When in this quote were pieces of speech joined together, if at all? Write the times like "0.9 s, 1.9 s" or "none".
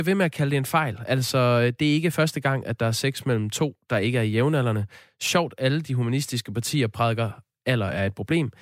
none